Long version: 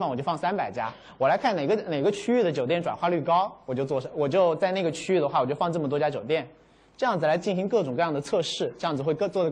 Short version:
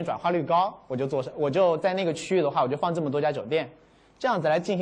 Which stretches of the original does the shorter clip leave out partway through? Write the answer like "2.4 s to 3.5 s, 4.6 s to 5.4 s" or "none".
none